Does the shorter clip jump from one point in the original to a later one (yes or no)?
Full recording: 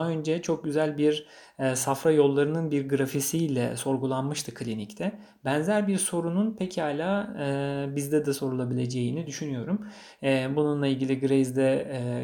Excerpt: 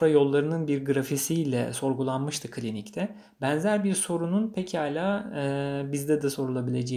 no